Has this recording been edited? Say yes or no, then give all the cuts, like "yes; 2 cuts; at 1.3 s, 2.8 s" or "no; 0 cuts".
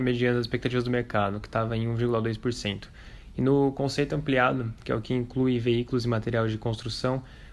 no; 0 cuts